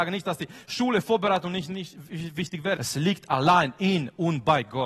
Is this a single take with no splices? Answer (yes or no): no